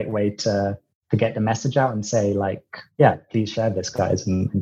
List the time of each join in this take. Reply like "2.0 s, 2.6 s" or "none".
none

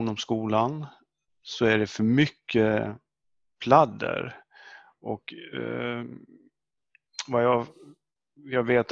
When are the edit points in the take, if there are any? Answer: none

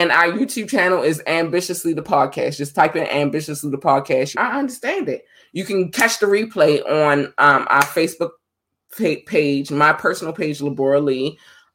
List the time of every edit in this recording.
4.3 s

